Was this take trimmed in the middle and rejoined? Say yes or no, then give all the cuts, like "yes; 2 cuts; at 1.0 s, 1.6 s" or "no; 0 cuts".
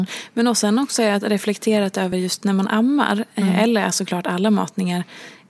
no; 0 cuts